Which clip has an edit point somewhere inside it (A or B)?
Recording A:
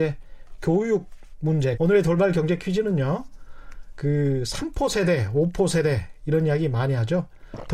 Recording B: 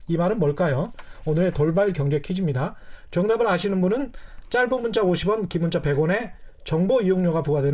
A